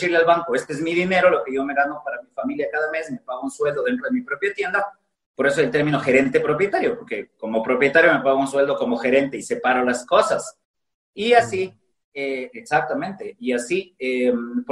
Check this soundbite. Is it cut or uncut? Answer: uncut